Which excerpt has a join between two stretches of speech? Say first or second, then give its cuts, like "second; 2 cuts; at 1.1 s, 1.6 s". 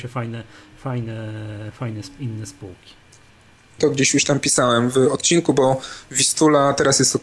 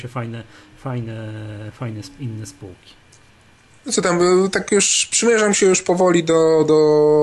first; 1 cut; at 3.8 s